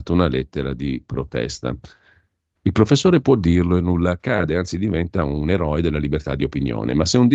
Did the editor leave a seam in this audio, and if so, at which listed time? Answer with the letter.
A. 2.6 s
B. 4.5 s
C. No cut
A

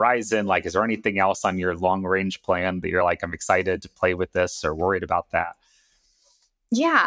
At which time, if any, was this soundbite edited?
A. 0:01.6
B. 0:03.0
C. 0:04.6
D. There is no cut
D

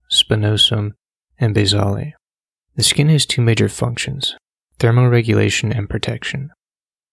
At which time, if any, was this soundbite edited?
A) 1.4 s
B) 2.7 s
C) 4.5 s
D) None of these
B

